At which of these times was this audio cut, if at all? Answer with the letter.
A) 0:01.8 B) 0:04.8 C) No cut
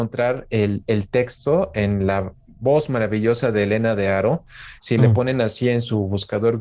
B